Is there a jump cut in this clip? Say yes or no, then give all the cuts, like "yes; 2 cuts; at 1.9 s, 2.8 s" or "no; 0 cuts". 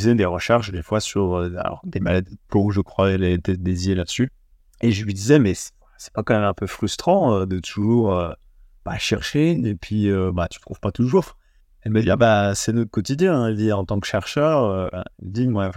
no; 0 cuts